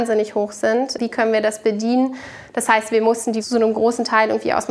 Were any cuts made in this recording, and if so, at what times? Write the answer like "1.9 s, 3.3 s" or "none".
none